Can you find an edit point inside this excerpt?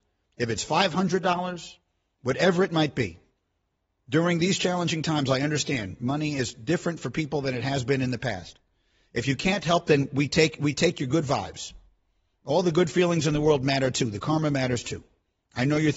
no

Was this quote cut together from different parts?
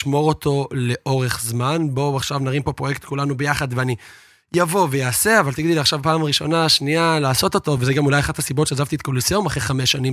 no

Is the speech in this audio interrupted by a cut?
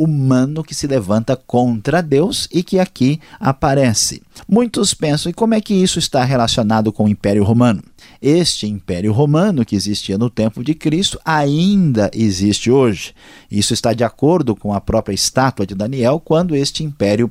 no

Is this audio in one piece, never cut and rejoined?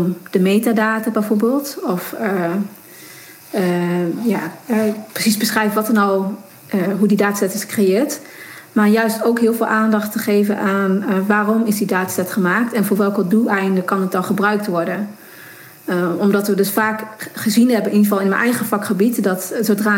yes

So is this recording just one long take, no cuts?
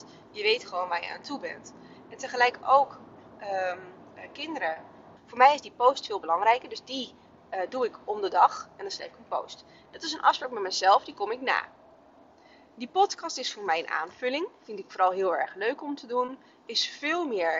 no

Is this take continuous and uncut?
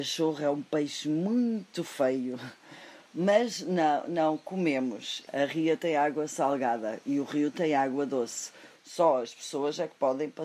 no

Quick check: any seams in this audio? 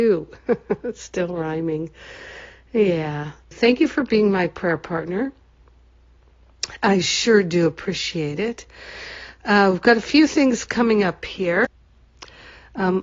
yes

